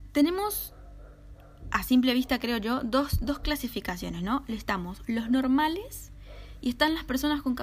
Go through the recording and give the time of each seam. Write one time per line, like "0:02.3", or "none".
none